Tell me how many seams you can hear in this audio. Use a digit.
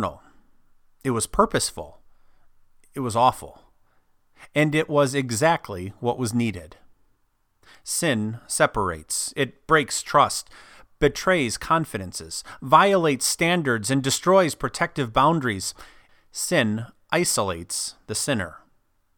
1